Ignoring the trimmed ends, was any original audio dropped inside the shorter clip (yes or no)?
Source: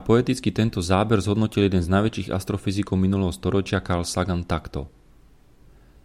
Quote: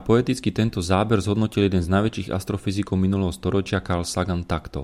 no